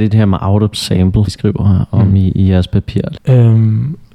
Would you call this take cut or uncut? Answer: cut